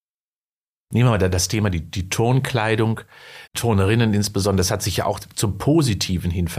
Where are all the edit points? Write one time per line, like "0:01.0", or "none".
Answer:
0:03.5